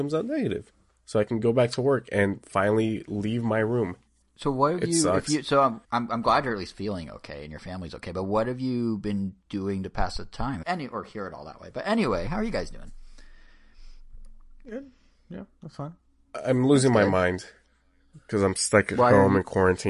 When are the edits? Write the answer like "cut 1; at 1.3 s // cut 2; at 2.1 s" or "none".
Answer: cut 1; at 4.2 s // cut 2; at 5.8 s // cut 3; at 10.6 s